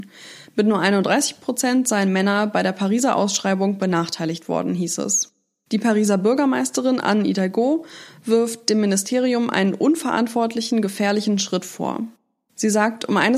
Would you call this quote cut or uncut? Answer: uncut